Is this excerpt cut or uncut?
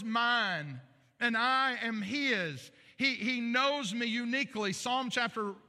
uncut